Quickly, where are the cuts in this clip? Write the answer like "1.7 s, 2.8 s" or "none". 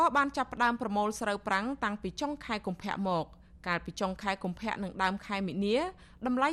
none